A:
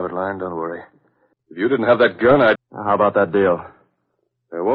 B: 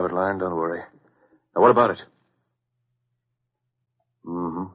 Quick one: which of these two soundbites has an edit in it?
A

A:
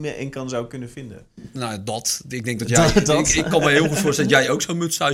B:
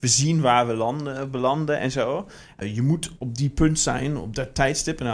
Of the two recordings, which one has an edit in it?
B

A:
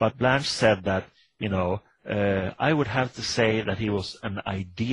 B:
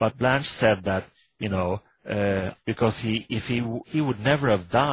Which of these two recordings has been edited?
B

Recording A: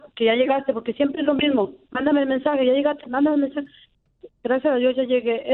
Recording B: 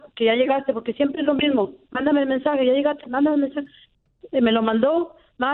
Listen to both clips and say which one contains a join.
A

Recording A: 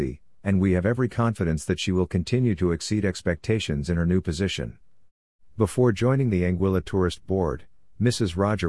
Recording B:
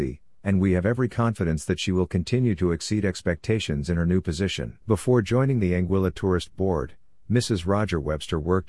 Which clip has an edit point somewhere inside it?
B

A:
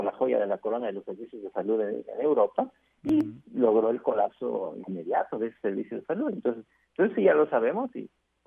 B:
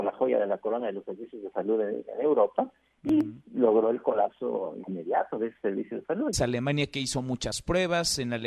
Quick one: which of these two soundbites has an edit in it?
B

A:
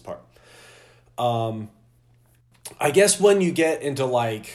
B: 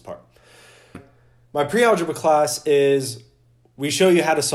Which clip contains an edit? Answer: B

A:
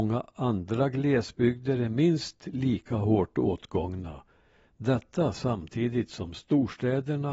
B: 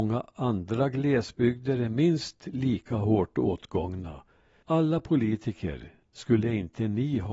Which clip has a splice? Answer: B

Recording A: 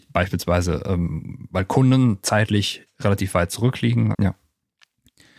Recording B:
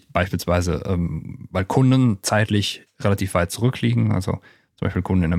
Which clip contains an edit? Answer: A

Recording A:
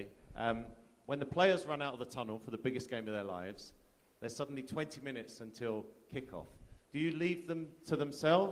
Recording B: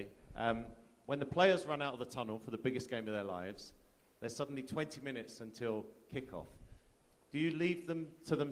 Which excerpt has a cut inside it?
A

